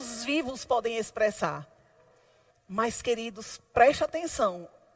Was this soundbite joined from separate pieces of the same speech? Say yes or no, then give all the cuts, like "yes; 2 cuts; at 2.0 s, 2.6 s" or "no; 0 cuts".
yes; 1 cut; at 2.5 s